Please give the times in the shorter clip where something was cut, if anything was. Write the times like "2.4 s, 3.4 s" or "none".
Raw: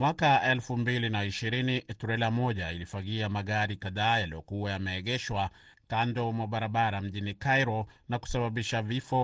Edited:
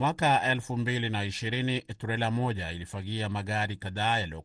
none